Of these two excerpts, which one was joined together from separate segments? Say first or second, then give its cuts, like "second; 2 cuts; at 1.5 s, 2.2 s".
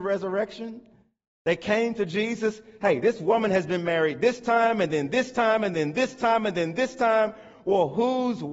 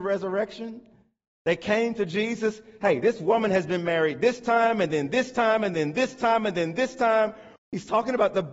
second; 1 cut; at 7.6 s